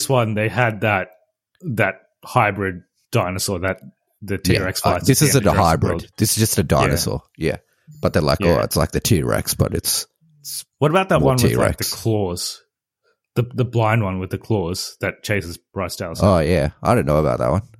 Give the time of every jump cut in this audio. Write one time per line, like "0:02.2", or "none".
none